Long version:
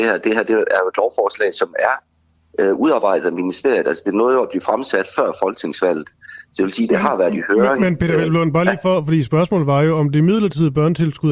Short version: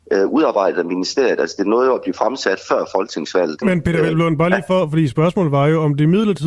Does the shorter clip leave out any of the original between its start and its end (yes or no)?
yes